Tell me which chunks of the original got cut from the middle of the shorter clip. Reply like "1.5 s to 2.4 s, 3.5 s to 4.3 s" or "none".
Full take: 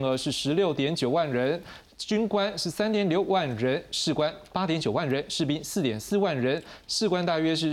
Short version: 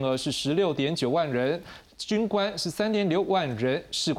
none